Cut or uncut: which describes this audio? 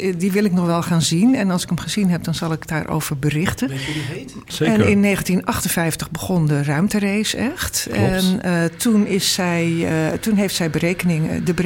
cut